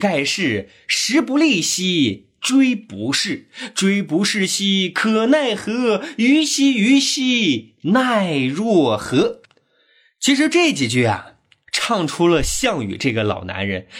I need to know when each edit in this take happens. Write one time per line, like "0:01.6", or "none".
none